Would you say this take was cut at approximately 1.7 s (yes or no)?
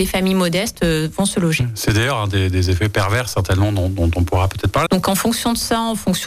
no